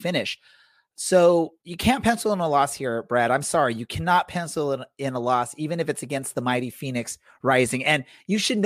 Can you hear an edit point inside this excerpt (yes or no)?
yes